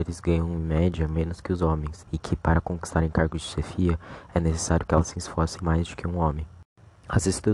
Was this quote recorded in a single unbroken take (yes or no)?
no